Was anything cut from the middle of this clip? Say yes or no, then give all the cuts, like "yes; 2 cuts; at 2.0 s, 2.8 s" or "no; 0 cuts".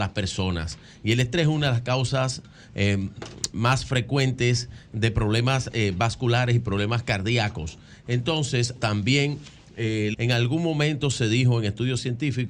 yes; 2 cuts; at 8.8 s, 10.1 s